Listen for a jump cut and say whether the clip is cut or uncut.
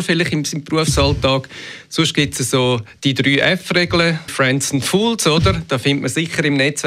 cut